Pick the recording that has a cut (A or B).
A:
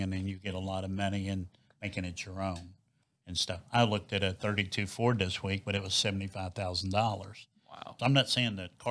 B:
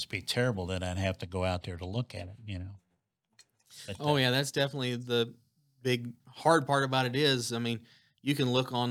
A